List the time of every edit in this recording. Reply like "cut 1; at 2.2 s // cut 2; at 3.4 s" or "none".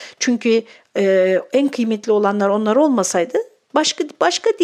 none